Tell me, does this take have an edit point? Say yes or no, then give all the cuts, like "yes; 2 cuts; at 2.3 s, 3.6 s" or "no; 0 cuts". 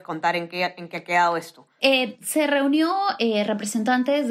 yes; 1 cut; at 1.8 s